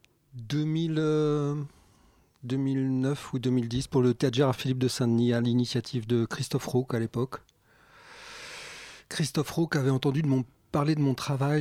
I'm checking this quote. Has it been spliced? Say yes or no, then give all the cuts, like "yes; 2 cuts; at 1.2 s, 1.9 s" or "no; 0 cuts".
no; 0 cuts